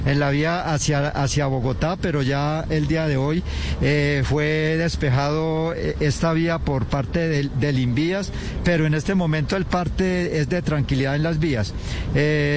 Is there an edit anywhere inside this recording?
no; 0 cuts

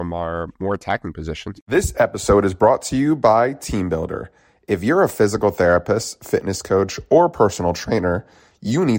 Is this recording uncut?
no; 1 cut; at 1.5 s

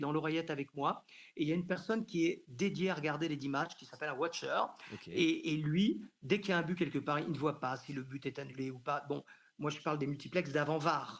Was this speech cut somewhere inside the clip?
no; 0 cuts

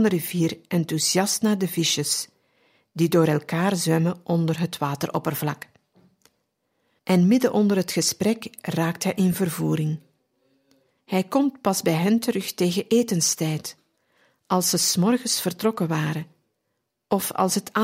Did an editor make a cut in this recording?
yes; 2 cuts; at 7.0 s, 11.0 s

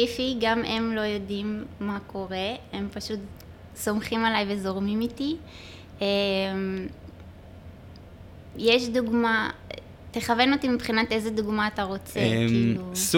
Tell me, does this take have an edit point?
no; 0 cuts

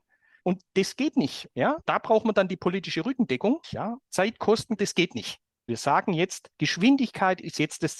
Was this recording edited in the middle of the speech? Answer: yes; 2 cuts; at 3.6 s, 4.8 s

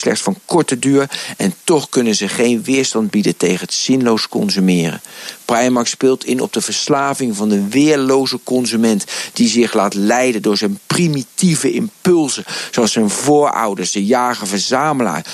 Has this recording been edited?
no; 0 cuts

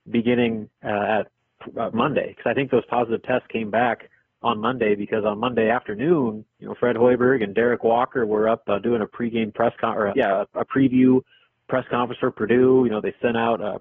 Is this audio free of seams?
no; 2 cuts; at 1.9 s, 10.1 s

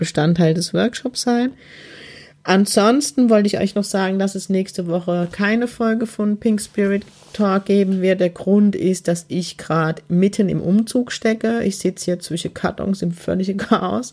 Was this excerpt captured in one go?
yes; 0 cuts

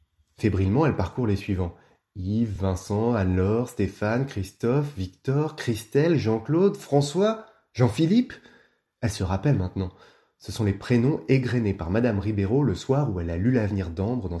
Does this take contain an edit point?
no; 0 cuts

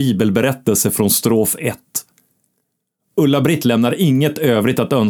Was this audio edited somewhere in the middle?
no; 0 cuts

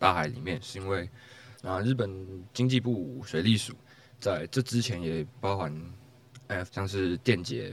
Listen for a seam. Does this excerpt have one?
yes; 2 cuts; at 1.5 s, 6.7 s

